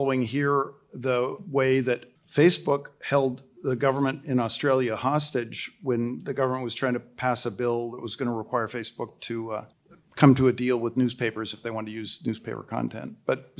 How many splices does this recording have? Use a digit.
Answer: 0